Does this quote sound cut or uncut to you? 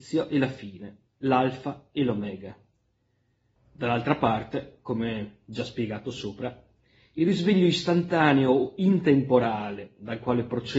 cut